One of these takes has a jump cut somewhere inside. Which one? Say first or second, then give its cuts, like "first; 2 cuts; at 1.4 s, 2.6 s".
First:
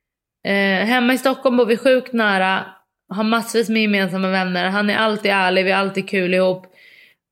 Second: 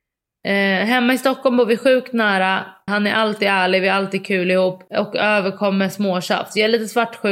second; 2 cuts; at 2.9 s, 4.9 s